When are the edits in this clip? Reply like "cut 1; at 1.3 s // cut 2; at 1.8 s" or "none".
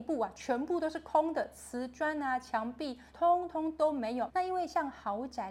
cut 1; at 3.1 s // cut 2; at 4.3 s